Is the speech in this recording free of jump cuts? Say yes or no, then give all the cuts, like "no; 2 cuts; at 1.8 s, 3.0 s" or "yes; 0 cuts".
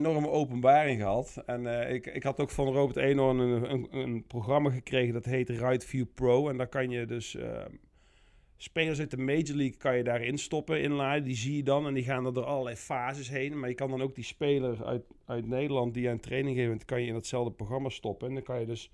yes; 0 cuts